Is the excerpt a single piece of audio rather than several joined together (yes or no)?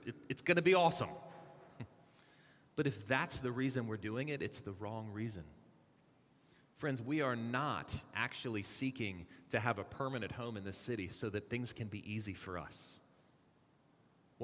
yes